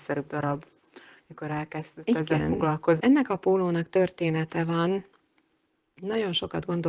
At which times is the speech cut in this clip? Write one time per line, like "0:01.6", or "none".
0:03.0